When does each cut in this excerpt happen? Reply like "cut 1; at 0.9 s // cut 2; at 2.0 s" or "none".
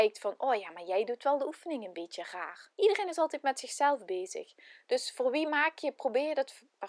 cut 1; at 2.7 s